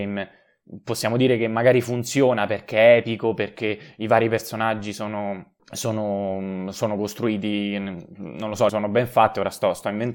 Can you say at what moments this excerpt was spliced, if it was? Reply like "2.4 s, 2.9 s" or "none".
5.6 s, 8.7 s